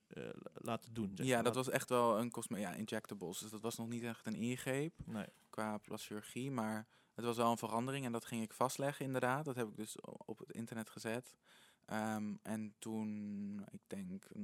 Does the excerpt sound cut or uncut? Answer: uncut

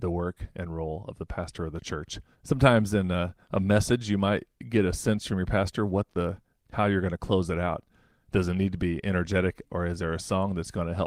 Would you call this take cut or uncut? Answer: cut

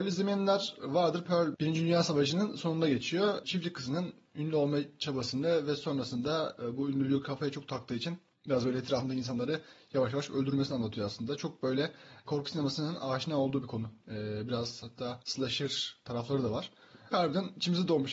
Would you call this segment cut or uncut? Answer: cut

